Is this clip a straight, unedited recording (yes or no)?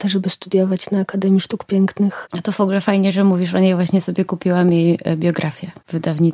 yes